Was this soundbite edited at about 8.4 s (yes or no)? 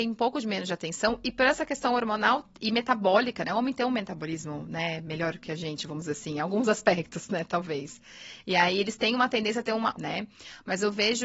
no